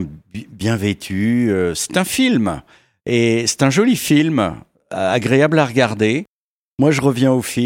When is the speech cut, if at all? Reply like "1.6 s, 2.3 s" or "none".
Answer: 6.7 s